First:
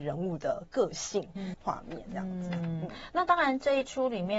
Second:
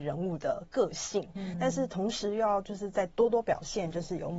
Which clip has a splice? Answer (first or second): first